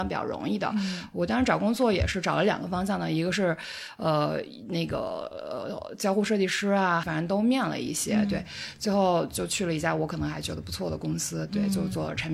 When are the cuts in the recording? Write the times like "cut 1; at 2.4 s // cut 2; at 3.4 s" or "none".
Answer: cut 1; at 7.0 s